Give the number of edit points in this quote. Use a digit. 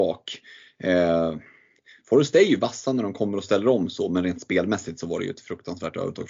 0